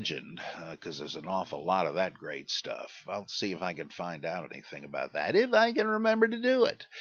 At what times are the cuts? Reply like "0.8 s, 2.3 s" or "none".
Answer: none